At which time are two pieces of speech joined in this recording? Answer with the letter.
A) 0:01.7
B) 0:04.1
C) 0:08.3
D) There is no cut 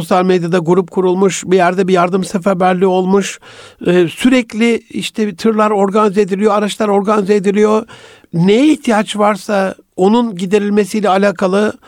D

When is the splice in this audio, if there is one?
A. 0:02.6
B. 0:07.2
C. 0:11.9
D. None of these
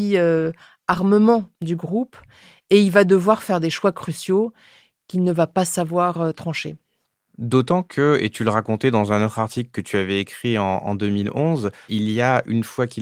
C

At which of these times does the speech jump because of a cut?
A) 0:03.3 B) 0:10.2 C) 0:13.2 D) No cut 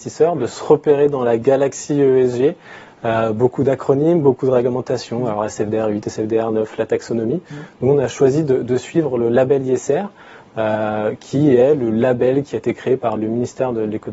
C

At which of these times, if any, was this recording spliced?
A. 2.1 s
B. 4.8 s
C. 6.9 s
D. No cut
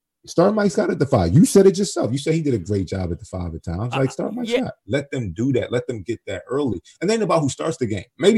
B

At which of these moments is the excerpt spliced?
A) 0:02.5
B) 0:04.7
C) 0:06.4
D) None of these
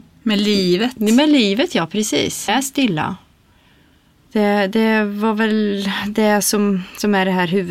A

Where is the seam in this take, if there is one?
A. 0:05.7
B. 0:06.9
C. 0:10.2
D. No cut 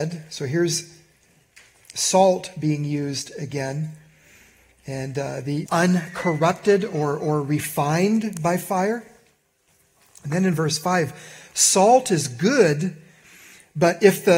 A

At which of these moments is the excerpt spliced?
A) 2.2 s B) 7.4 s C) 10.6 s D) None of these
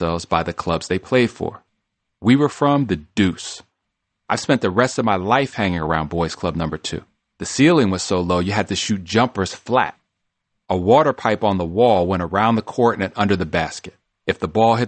B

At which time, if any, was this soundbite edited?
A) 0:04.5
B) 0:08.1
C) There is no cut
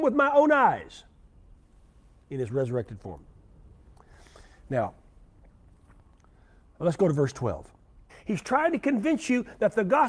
B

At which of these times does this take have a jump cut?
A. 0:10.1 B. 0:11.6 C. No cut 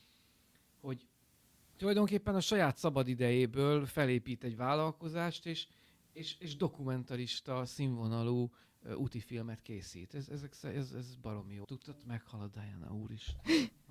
B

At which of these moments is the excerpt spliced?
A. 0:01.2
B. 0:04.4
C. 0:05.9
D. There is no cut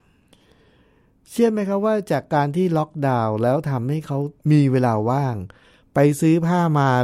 B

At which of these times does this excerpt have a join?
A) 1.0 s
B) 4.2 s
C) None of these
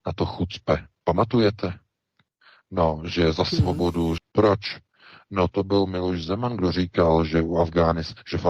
B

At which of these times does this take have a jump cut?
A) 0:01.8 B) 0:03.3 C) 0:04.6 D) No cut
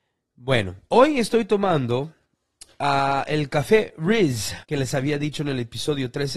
C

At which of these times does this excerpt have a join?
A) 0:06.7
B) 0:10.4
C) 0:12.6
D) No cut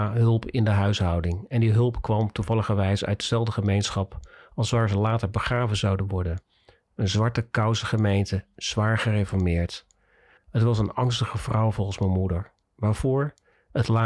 B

